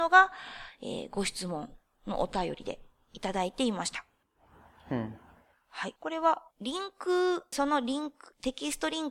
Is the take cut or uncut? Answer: cut